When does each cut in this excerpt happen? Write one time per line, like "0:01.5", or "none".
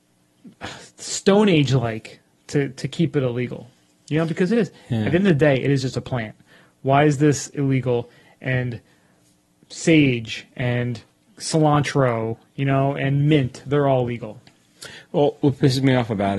none